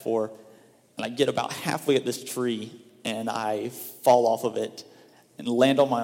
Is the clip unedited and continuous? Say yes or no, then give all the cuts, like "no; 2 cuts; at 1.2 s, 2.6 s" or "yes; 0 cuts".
yes; 0 cuts